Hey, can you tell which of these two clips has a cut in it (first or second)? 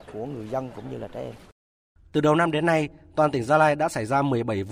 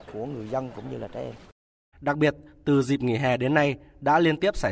second